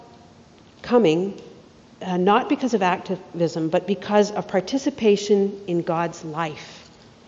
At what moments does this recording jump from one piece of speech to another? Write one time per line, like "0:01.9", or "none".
none